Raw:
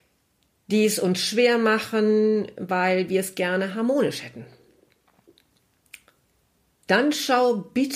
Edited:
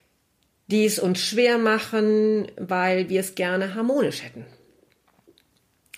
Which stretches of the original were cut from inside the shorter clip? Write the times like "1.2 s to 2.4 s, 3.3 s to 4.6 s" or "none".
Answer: none